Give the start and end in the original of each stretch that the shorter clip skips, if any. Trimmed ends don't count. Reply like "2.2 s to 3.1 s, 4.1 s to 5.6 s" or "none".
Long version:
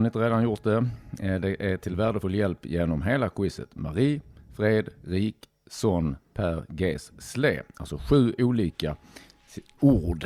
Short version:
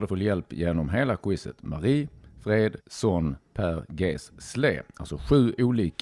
4.9 s to 5.6 s